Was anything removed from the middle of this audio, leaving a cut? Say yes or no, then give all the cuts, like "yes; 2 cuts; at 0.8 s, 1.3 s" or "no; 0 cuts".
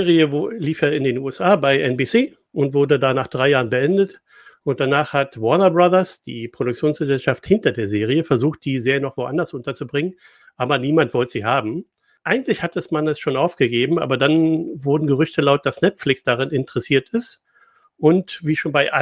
no; 0 cuts